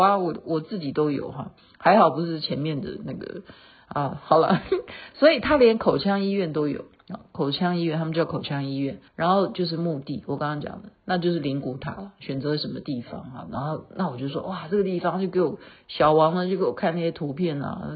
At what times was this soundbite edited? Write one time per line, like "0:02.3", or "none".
0:09.1